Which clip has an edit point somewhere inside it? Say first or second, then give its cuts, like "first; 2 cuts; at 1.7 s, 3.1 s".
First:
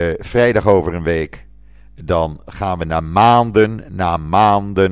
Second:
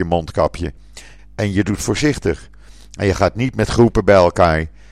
second; 1 cut; at 1.2 s